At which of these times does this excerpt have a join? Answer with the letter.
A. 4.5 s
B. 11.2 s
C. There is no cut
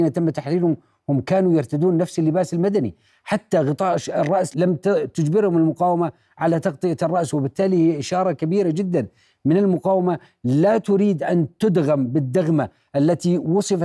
A